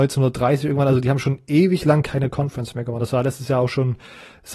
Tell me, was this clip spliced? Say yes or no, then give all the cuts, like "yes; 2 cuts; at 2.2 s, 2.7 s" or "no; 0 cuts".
no; 0 cuts